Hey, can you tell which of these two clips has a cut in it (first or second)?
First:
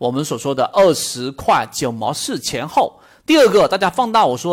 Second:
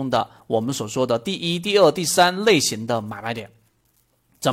first